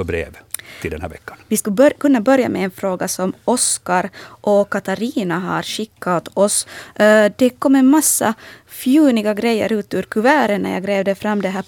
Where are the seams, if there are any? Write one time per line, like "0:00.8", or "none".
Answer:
0:01.4